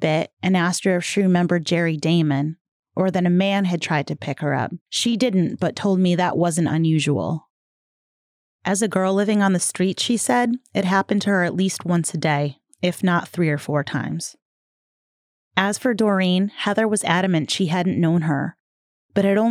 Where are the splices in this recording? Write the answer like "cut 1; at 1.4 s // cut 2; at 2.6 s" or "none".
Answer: cut 1; at 4.8 s